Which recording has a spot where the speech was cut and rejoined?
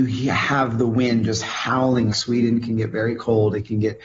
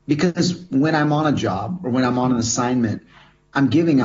first; 1 cut; at 2.1 s

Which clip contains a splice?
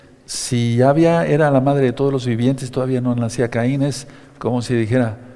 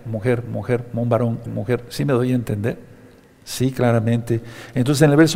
second; 1 cut; at 1.4 s

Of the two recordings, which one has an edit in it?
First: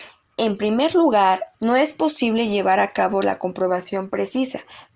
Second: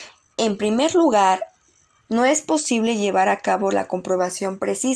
first; 1 cut; at 1.5 s

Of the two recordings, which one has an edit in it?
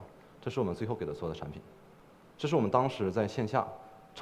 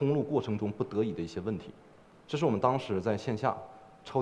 first; 1 cut; at 2.2 s

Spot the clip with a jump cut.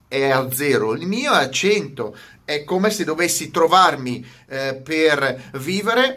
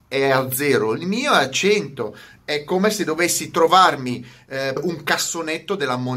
second; 1 cut; at 4.8 s

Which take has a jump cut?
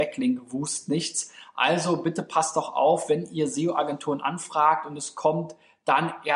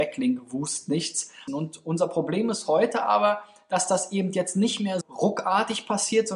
second; 2 cuts; at 1.5 s, 5.0 s

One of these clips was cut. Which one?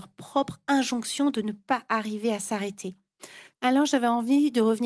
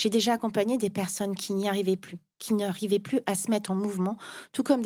first; 1 cut; at 3.6 s

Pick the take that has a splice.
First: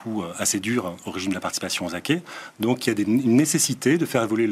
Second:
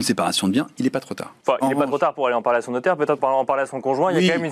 second; 2 cuts; at 1.4 s, 3.2 s

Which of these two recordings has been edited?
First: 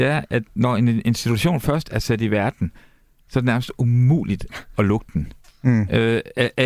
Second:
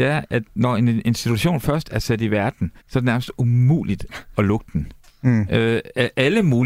second; 1 cut; at 2.8 s

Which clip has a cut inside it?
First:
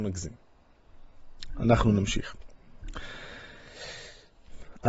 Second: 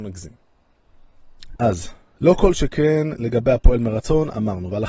second; 1 cut; at 1.6 s

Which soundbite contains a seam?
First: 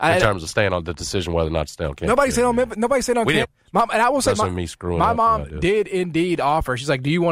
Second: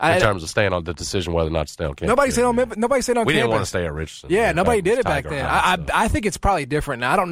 first; 1 cut; at 3.4 s

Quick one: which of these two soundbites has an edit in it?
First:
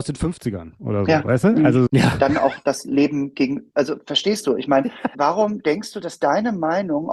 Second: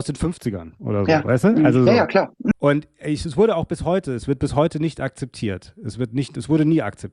first; 2 cuts; at 1.9 s, 5.1 s

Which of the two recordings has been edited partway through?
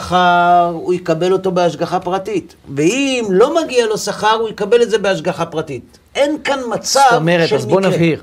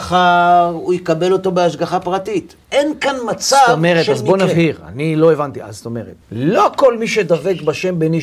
second; 2 cuts; at 2.6 s, 6.2 s

